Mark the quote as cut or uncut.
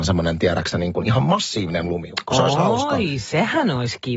uncut